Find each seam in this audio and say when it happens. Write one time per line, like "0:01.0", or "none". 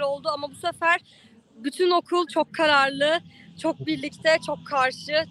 none